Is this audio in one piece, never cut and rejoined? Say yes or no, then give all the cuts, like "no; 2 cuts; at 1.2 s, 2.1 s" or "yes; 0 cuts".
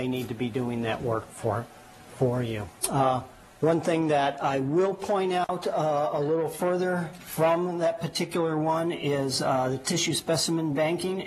yes; 0 cuts